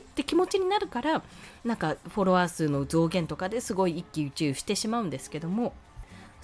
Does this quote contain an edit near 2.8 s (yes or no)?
no